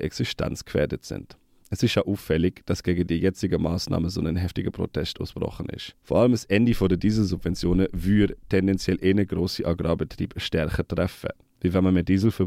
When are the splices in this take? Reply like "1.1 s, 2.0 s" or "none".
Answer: none